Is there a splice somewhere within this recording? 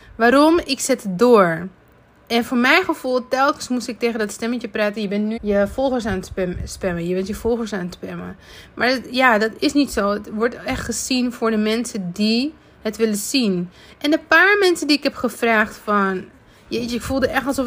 yes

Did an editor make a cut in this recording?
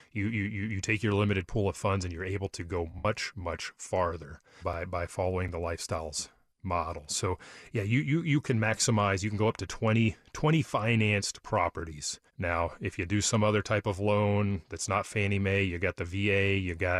yes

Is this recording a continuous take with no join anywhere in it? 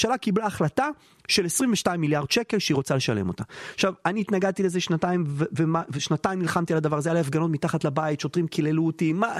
yes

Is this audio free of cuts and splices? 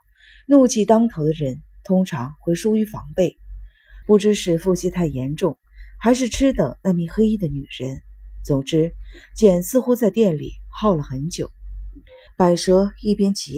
no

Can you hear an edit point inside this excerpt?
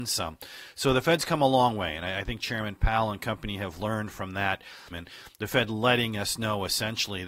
yes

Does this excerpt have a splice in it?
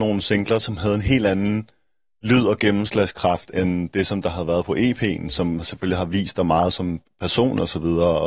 no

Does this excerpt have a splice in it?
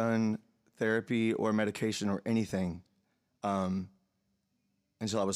no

